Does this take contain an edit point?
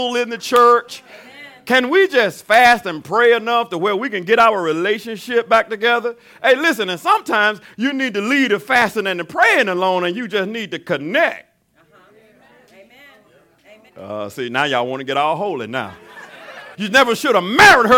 yes; 2 cuts; at 13.9 s, 16.7 s

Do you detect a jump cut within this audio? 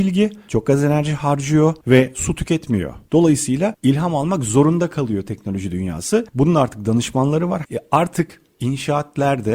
yes; 2 cuts; at 3.1 s, 7.7 s

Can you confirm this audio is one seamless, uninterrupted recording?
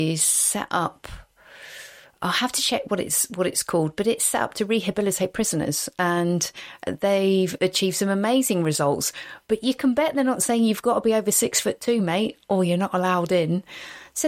yes; 0 cuts

